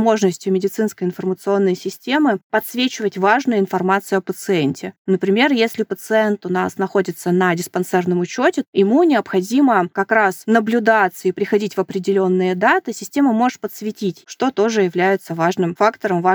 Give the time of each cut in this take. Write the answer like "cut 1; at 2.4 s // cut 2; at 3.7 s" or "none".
cut 1; at 14.2 s